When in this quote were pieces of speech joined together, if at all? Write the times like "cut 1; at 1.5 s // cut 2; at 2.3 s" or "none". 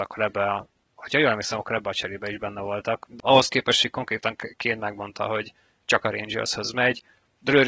cut 1; at 3.2 s